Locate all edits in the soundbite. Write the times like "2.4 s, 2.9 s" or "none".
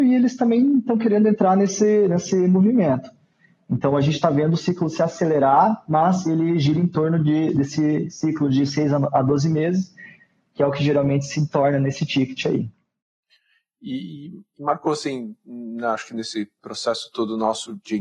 none